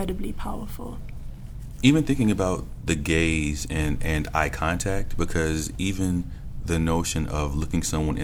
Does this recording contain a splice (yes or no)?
no